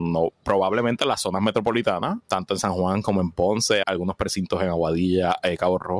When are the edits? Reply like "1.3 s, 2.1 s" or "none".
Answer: 2.2 s, 3.8 s